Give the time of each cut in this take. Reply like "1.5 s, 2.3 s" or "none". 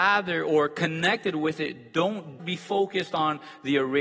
2.4 s